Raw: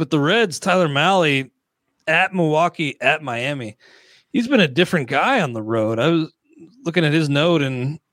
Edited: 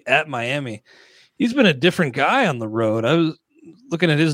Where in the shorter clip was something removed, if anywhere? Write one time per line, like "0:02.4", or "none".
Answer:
none